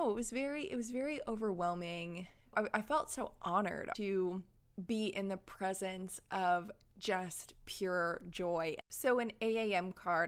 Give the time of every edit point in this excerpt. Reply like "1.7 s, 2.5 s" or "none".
3.9 s, 8.8 s